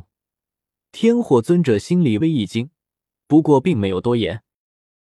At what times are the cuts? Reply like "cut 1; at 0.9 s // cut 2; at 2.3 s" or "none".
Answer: cut 1; at 2.2 s